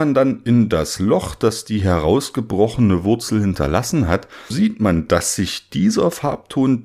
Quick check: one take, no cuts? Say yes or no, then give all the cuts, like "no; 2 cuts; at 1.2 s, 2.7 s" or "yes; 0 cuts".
no; 1 cut; at 4.5 s